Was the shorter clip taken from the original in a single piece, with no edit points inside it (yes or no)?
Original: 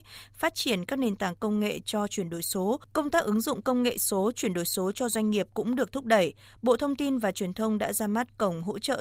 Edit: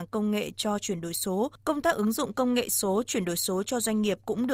yes